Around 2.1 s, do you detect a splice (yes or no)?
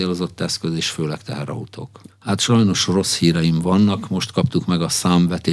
yes